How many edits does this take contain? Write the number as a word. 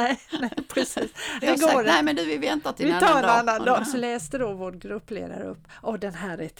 two